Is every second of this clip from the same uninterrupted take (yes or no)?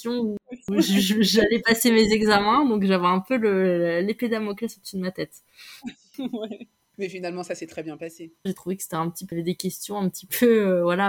no